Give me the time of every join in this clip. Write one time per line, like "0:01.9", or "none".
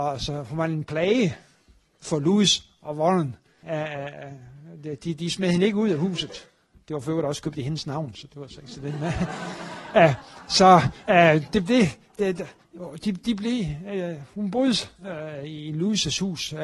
0:03.6